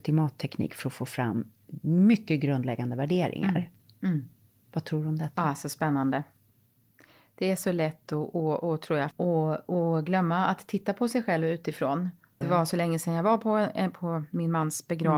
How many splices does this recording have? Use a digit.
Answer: 2